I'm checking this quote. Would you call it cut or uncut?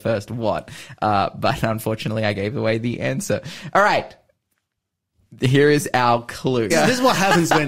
cut